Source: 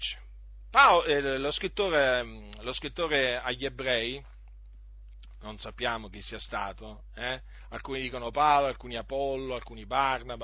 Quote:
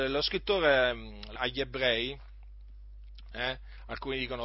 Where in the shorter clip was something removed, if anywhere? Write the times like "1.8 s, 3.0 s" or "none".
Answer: 1.4 s, 3.3 s